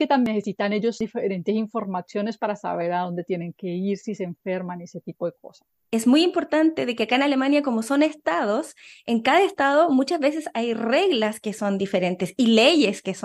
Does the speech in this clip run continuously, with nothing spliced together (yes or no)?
yes